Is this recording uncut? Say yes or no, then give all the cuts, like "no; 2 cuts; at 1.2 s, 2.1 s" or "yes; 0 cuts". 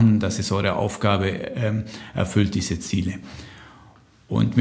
yes; 0 cuts